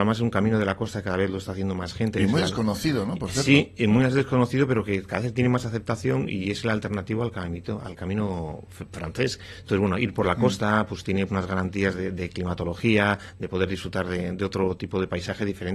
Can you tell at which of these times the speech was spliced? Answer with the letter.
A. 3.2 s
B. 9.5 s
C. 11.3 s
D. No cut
C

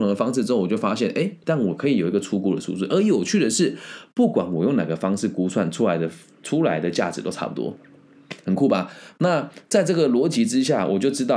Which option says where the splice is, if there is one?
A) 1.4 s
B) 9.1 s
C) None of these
A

